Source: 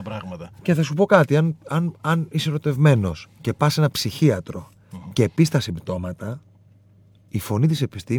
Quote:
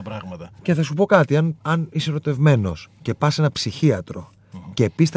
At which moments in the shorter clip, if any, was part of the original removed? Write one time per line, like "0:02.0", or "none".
0:01.6